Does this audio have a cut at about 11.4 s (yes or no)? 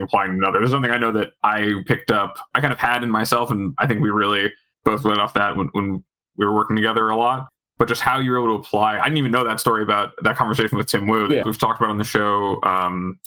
yes